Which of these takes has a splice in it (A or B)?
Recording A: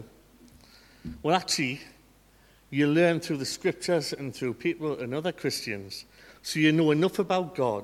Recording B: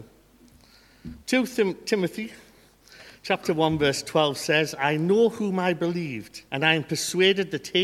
B